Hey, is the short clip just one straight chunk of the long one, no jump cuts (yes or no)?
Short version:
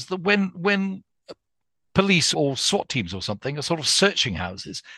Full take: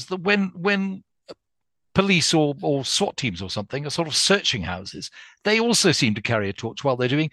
no